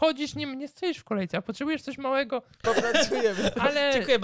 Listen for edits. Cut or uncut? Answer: cut